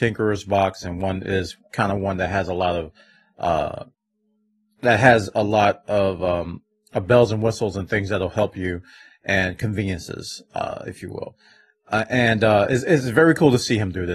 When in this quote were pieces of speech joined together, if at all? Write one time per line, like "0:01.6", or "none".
none